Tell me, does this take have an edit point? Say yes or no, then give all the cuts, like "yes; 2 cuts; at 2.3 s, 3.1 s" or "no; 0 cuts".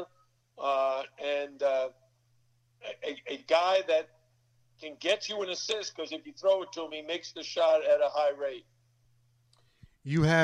no; 0 cuts